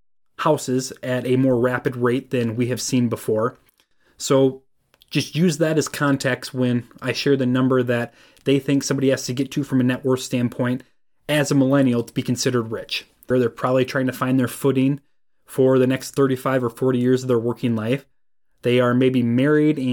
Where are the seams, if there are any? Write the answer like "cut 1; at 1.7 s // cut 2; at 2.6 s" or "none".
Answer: cut 1; at 13.3 s